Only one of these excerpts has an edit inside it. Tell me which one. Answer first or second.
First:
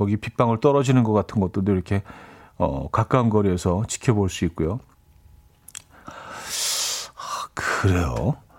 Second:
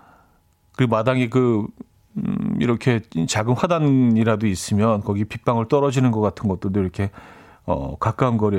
first